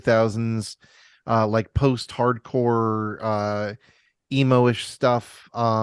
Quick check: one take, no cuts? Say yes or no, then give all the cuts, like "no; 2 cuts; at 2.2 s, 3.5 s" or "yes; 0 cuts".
yes; 0 cuts